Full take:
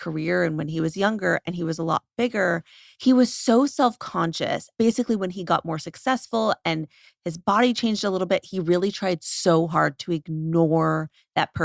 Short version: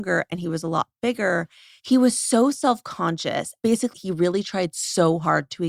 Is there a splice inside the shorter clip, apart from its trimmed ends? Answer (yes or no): yes